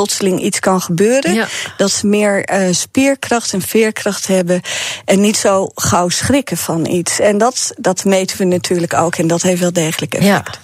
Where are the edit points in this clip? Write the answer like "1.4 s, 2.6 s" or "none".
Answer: none